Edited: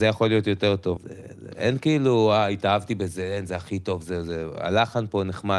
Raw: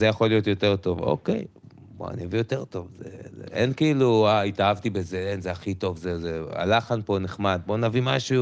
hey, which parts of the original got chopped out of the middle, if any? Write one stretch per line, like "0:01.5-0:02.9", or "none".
0:01.0-0:02.9